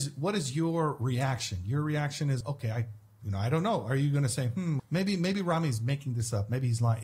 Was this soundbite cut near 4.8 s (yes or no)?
yes